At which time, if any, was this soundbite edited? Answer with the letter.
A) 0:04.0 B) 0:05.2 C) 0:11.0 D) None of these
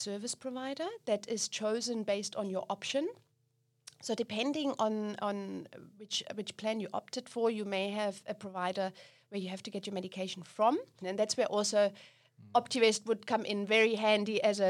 C